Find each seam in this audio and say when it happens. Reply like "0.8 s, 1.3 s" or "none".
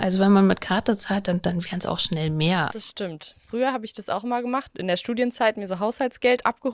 2.7 s